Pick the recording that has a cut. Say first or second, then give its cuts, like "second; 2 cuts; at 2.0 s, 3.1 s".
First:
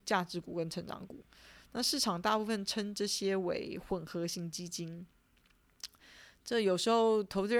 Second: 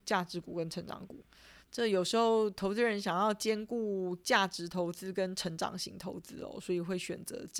second; 1 cut; at 1.6 s